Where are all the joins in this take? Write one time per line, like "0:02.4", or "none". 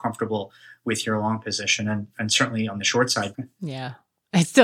0:03.3